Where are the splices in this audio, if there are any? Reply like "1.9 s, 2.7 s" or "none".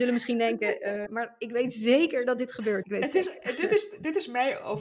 1.1 s, 2.8 s